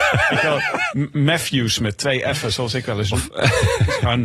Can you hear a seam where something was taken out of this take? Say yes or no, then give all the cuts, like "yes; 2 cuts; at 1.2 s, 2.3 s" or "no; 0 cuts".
no; 0 cuts